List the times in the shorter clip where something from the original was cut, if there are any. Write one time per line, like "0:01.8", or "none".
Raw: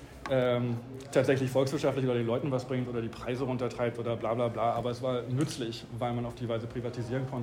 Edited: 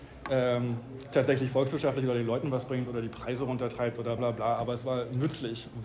0:04.2